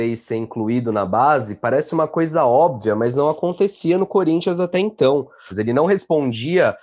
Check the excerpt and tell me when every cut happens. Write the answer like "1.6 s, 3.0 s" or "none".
5.5 s